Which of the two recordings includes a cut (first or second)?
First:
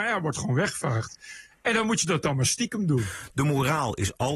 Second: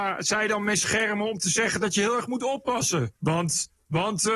second